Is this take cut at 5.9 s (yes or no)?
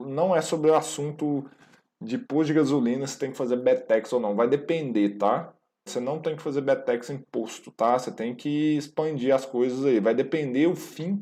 yes